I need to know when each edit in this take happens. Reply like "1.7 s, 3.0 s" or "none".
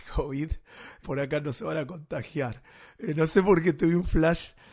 1.0 s